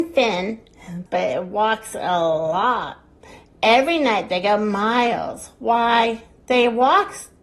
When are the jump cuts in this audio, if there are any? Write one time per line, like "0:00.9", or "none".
0:01.1